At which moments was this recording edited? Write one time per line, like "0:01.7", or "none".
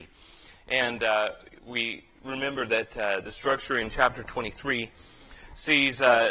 none